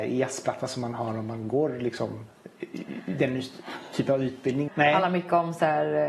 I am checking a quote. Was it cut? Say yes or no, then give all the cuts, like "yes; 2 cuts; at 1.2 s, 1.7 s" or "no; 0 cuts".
yes; 1 cut; at 4.7 s